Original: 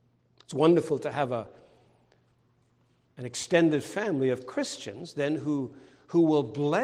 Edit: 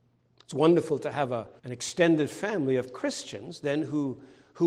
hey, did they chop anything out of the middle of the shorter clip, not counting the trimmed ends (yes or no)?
yes